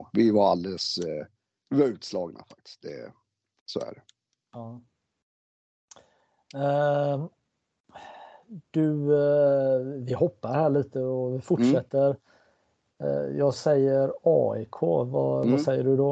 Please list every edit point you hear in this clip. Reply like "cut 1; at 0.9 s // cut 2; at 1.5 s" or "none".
none